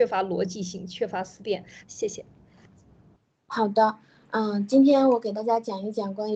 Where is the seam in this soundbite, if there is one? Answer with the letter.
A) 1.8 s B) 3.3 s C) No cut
A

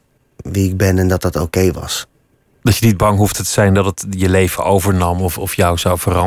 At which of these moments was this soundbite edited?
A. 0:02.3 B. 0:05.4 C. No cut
C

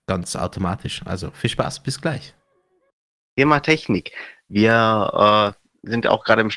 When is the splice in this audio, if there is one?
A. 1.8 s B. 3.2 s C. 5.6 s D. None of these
B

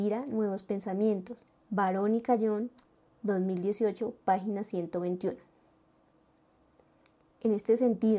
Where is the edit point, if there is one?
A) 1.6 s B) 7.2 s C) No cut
A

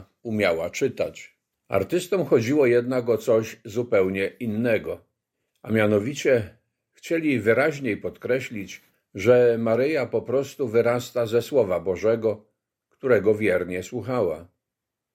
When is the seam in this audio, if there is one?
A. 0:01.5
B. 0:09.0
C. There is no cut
A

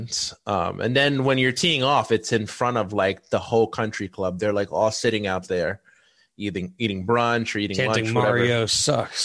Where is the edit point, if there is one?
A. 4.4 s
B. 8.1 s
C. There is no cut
C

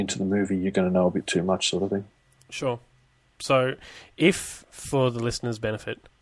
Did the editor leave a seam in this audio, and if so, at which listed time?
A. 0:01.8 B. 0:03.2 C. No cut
C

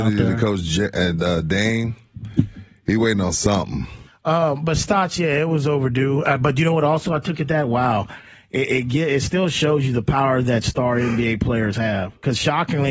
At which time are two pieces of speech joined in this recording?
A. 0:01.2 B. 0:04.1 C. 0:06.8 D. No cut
B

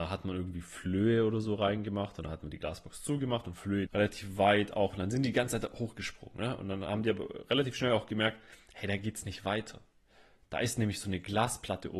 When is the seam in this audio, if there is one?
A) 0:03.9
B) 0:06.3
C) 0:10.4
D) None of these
A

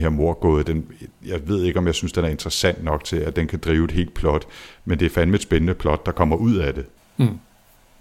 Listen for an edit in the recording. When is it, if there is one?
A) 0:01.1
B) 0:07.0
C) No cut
B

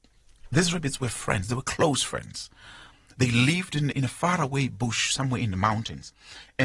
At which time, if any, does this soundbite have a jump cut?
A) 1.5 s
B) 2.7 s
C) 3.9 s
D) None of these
C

